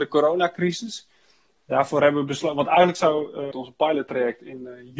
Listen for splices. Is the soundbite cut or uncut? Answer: cut